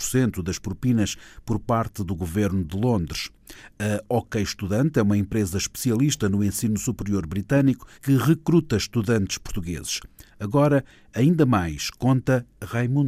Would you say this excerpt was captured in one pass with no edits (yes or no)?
no